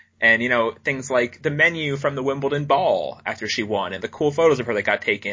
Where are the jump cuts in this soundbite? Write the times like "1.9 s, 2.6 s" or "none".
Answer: 4.0 s